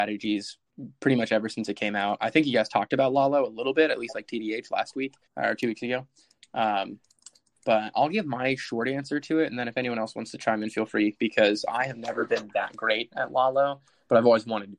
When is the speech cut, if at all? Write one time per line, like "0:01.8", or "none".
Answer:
0:05.2